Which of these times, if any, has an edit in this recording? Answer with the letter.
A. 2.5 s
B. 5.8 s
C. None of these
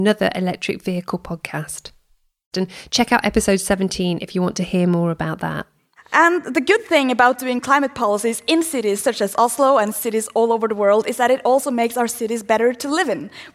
A